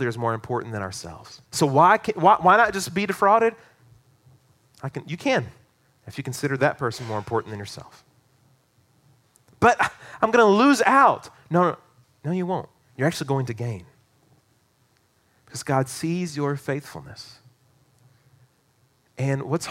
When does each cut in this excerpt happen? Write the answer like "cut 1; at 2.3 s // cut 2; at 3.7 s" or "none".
cut 1; at 1.4 s

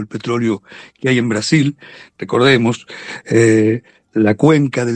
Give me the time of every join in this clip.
none

